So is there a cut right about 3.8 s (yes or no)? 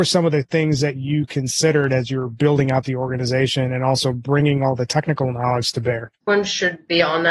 no